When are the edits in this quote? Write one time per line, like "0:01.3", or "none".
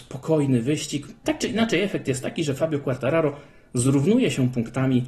0:01.2

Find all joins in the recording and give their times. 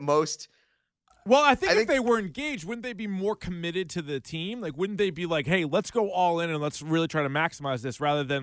none

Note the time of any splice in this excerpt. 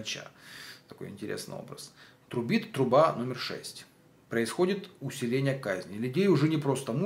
none

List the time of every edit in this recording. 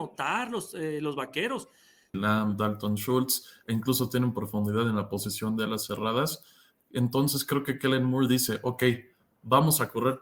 0:02.1

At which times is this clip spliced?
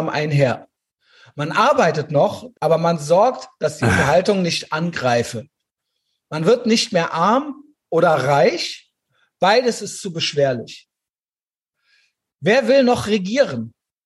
0:02.5

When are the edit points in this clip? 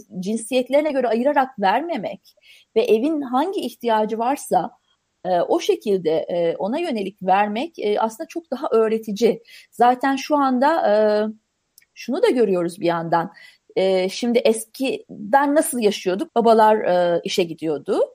0:16.3

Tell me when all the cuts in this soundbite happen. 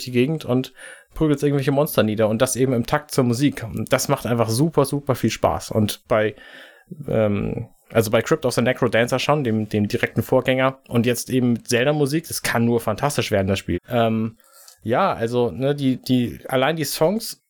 0:13.7

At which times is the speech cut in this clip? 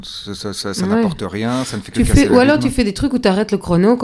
none

